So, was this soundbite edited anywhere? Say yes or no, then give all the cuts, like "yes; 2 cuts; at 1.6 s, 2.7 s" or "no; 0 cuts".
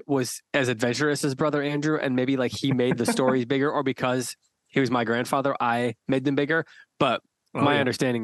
no; 0 cuts